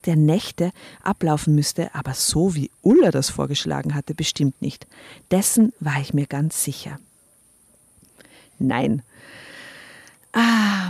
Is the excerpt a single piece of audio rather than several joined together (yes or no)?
no